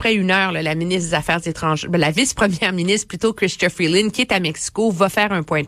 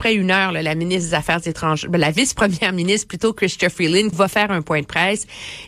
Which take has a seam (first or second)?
second